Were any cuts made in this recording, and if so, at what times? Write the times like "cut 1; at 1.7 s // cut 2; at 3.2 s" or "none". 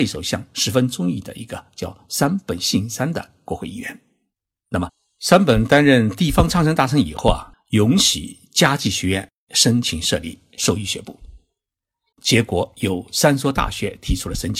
cut 1; at 7.5 s // cut 2; at 12.1 s